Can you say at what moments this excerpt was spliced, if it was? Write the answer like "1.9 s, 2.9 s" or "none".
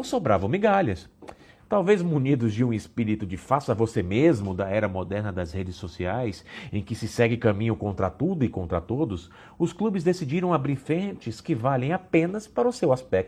1.6 s